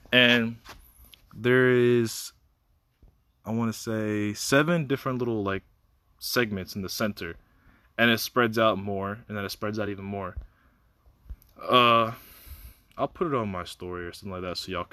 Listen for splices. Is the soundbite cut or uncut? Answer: uncut